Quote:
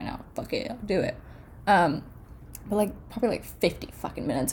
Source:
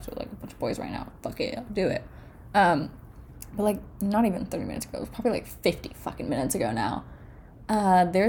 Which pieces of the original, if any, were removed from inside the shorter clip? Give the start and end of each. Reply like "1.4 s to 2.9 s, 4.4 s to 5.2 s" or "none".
4.0 s to 5.1 s